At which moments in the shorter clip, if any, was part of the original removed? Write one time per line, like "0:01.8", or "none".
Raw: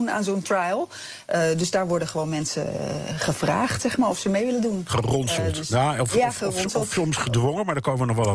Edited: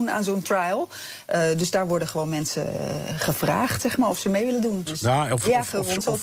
0:04.9